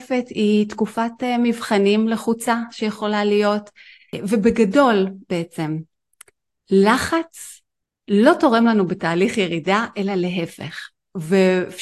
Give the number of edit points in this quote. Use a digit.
0